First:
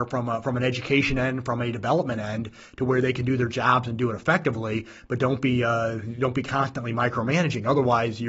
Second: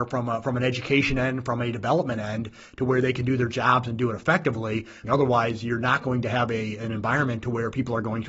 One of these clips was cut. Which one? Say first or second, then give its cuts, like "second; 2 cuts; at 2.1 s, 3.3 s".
second; 1 cut; at 5.0 s